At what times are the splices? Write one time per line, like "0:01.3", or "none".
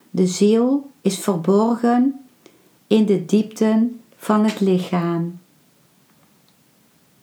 none